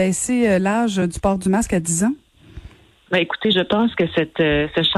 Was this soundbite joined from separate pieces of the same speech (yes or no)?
no